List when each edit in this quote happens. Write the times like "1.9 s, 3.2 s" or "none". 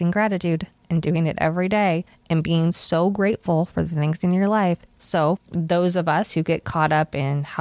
5.4 s